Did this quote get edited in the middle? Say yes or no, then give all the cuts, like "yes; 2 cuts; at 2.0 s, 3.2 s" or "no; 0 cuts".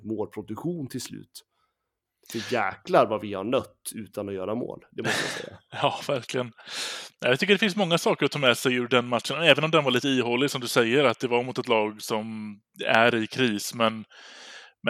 no; 0 cuts